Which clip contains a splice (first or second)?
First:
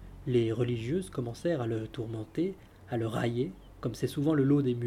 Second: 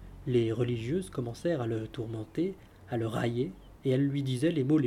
second